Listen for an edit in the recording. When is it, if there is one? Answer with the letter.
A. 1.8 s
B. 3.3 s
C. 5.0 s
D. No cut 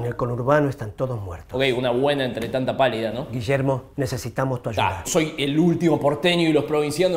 C